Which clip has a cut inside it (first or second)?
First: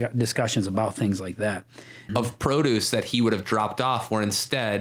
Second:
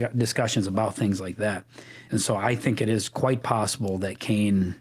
first